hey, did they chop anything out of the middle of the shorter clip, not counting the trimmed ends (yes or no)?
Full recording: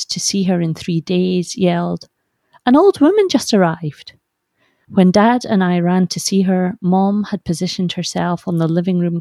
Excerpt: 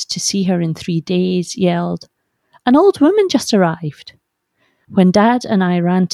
no